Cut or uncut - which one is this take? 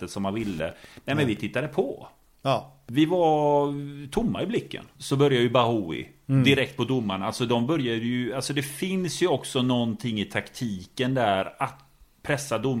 cut